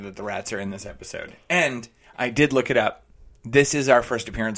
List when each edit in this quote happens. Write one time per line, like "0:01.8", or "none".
none